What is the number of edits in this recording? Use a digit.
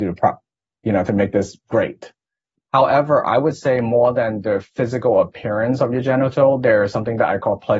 1